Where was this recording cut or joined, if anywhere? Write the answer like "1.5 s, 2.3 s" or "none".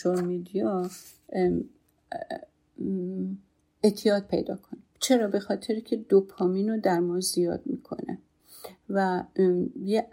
4.9 s